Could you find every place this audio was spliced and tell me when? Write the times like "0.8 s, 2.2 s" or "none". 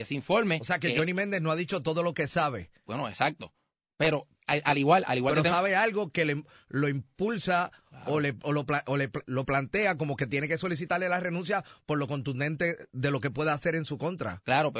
9.2 s